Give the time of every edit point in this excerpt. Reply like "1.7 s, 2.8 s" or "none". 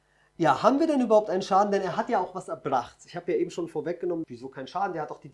4.2 s